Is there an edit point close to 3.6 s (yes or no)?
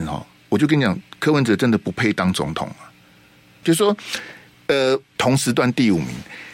yes